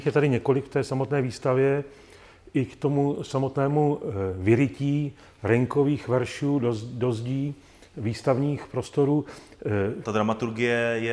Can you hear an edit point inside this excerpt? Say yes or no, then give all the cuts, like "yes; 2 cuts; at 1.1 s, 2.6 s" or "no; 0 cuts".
yes; 1 cut; at 10.0 s